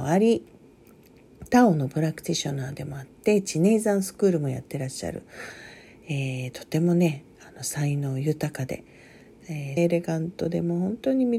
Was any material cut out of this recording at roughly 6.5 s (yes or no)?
no